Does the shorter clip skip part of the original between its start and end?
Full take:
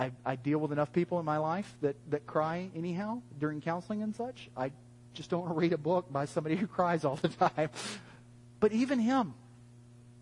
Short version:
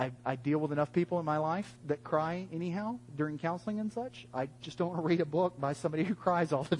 yes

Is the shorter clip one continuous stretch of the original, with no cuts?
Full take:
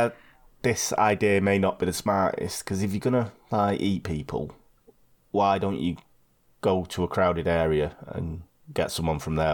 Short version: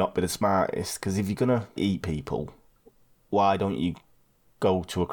no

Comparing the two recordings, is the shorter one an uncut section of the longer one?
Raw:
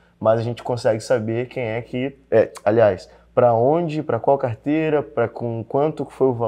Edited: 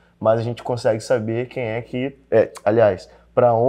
yes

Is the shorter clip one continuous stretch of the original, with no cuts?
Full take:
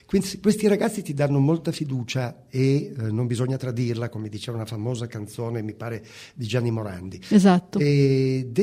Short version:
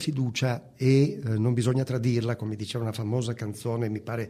yes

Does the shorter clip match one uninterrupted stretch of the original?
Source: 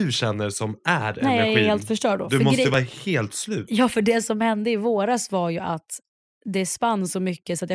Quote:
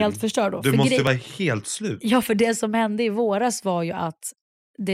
yes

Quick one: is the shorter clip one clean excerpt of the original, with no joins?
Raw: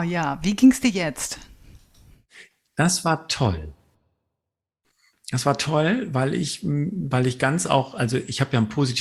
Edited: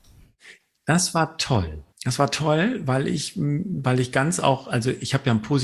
no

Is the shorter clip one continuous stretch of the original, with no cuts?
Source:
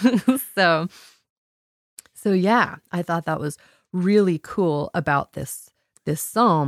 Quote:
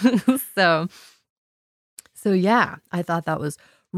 yes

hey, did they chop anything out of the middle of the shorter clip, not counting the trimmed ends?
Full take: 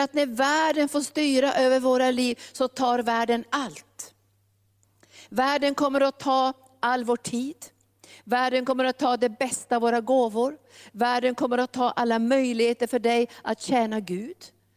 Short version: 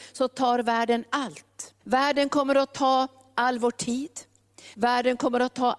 yes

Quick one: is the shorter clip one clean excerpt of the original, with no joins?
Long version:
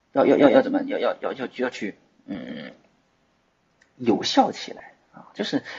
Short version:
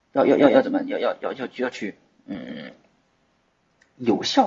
yes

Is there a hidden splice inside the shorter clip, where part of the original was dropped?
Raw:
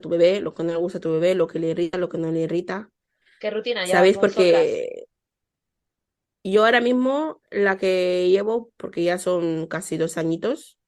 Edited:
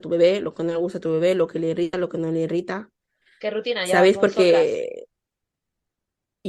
no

